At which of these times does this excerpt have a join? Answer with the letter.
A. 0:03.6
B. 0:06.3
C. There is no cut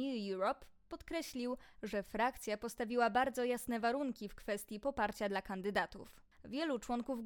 B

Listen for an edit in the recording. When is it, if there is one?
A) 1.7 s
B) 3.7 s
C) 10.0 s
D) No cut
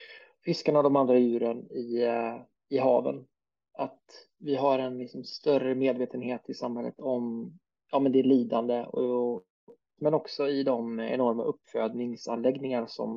C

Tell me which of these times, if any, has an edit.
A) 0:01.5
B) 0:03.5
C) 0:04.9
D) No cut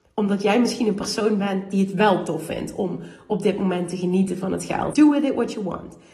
C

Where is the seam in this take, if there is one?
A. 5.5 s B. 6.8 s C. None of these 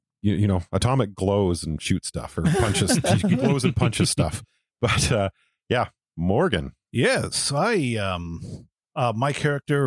C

